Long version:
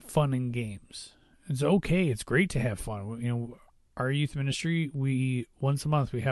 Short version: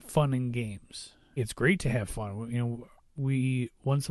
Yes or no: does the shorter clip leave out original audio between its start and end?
yes